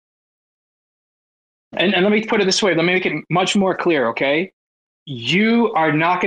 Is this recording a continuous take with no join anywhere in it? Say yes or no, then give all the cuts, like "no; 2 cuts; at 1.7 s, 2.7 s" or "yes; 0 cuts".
yes; 0 cuts